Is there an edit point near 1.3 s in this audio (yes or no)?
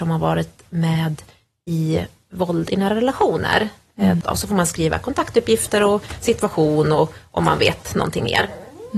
no